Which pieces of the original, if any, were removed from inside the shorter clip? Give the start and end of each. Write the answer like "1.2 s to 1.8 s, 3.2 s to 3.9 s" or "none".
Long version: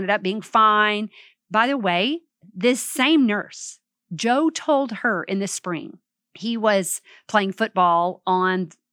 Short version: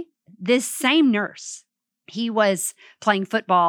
4.0 s to 6.2 s